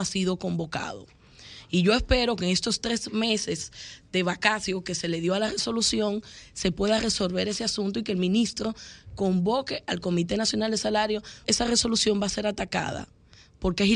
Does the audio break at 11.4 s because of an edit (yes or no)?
yes